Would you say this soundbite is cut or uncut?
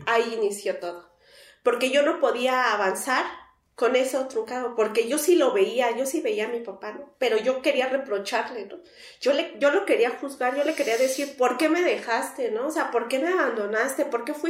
uncut